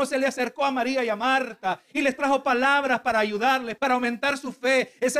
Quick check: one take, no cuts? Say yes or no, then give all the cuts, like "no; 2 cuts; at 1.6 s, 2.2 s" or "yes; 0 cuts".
no; 1 cut; at 3.8 s